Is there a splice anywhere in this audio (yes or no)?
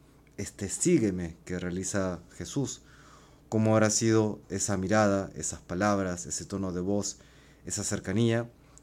no